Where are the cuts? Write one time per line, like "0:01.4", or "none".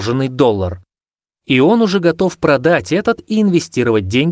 none